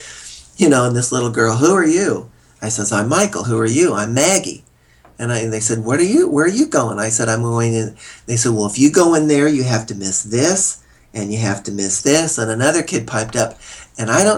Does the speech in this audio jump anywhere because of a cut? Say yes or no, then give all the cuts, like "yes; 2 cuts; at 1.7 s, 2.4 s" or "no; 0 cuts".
no; 0 cuts